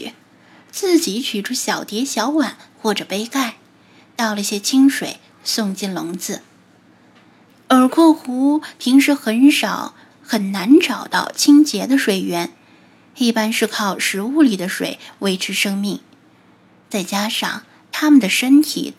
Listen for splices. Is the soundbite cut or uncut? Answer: cut